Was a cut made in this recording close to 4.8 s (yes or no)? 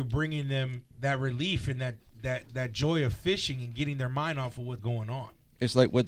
yes